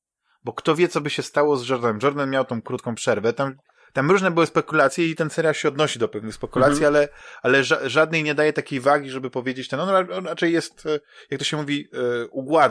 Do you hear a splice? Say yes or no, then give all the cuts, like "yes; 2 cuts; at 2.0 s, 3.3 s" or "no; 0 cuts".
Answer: no; 0 cuts